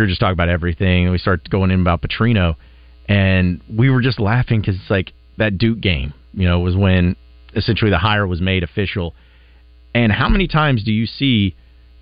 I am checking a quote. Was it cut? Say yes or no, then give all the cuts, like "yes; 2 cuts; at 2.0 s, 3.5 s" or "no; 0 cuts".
no; 0 cuts